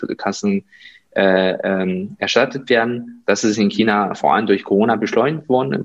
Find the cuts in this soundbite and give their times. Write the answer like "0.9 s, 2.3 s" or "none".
none